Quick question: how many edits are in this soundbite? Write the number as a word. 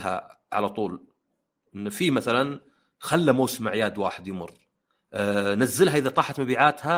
zero